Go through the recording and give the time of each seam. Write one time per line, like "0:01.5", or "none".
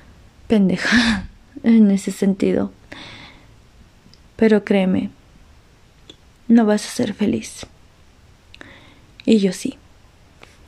none